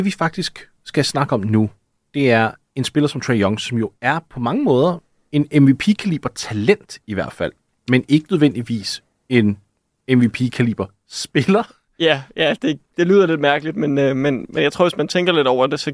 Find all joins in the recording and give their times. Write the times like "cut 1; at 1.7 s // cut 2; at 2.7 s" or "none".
none